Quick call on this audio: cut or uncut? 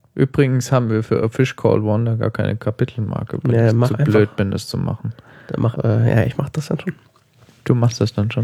cut